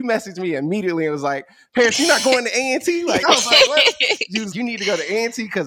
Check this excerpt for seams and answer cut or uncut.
cut